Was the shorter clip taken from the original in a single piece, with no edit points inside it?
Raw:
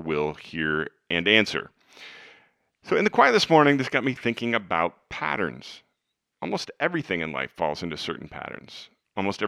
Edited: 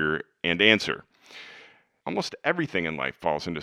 no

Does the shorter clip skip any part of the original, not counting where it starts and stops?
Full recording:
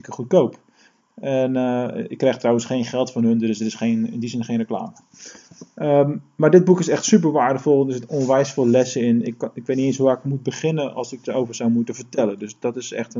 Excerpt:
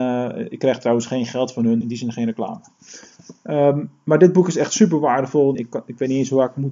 yes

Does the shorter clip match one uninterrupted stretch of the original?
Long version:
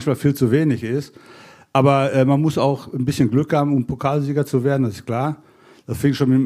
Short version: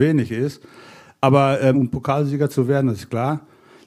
no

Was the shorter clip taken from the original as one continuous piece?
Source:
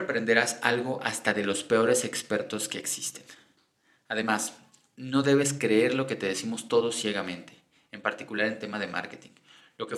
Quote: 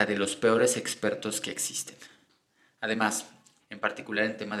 no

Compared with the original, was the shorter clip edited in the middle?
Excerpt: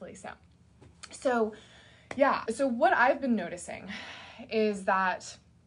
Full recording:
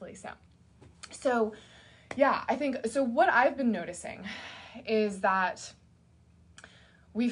yes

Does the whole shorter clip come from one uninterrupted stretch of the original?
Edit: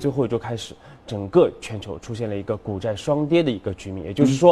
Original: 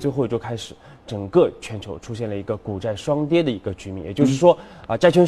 yes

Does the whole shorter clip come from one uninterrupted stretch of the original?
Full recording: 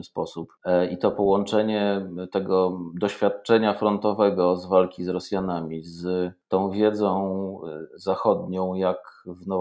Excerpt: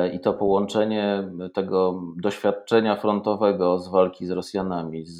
yes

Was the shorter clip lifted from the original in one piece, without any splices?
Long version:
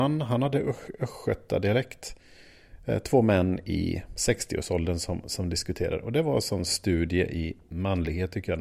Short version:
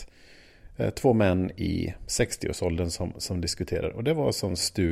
yes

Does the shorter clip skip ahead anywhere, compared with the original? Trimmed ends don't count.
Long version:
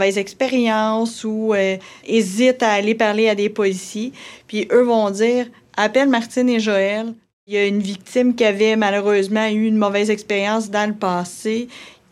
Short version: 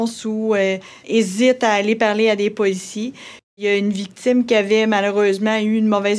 yes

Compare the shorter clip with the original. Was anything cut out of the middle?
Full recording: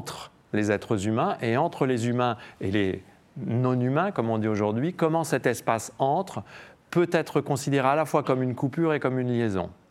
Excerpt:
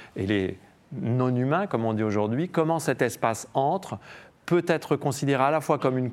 no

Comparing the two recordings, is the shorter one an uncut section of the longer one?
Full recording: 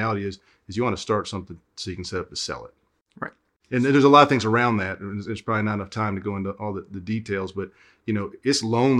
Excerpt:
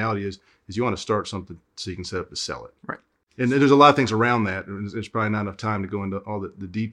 no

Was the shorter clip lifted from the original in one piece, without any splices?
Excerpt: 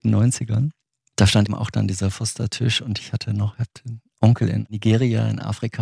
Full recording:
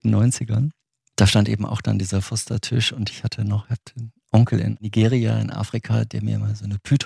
no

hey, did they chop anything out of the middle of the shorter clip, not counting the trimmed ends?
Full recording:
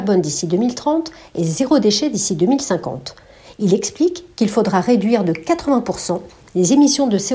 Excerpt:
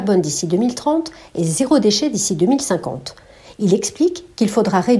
no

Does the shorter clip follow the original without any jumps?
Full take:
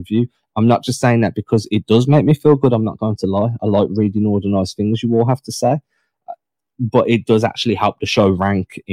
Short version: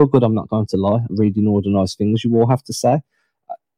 no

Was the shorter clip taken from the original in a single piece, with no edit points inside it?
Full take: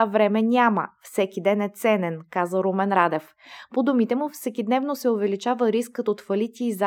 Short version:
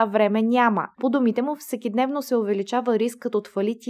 no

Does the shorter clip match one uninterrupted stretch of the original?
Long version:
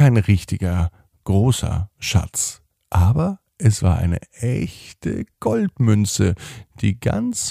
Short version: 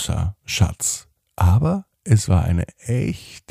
yes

